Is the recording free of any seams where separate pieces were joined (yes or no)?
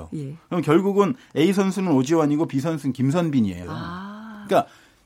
no